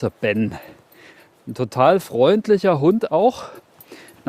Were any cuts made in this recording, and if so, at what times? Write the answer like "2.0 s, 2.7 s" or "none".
3.1 s